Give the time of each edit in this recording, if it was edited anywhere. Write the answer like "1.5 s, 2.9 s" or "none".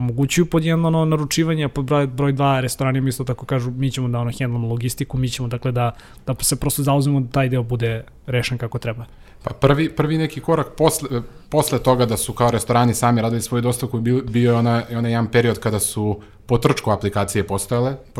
none